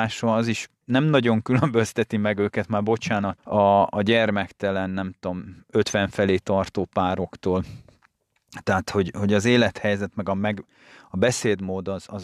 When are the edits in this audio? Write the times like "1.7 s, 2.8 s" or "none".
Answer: 3.4 s